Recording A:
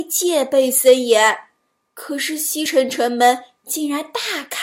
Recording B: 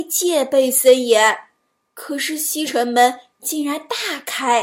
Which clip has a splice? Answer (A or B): B